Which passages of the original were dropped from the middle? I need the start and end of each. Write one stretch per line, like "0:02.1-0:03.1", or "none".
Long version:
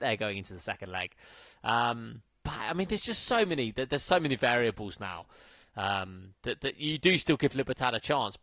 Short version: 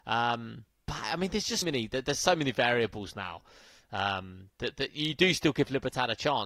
0:03.2-0:03.5